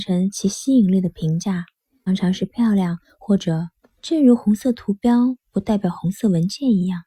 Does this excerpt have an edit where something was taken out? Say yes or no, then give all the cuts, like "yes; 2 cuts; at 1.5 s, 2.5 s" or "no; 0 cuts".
yes; 2 cuts; at 2.1 s, 3.8 s